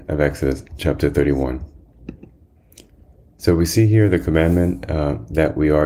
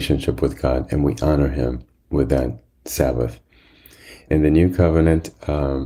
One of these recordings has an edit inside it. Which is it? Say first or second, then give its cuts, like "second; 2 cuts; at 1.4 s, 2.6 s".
second; 1 cut; at 4.3 s